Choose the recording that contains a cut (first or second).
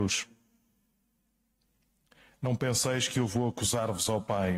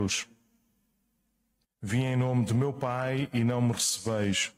second